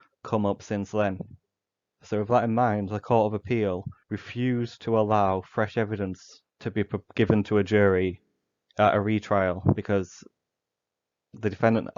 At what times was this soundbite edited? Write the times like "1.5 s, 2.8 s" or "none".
2.0 s, 4.0 s, 6.5 s